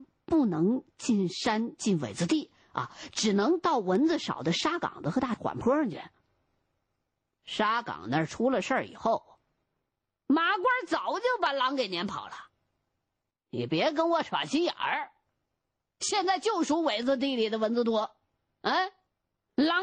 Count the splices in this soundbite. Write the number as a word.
one